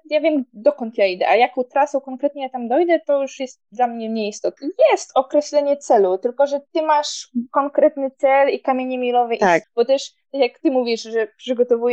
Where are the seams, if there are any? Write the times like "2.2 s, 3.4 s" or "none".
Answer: 4.6 s, 9.6 s